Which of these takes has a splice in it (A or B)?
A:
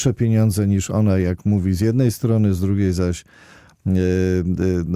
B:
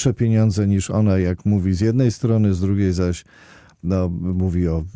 B